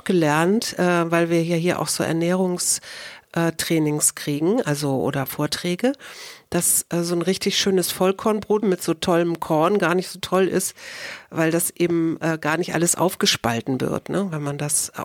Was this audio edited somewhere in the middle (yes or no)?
yes